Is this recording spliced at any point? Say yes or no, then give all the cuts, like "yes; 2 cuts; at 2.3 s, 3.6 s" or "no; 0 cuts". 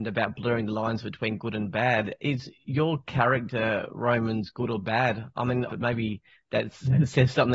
yes; 1 cut; at 5.7 s